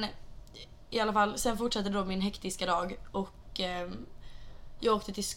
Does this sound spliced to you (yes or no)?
no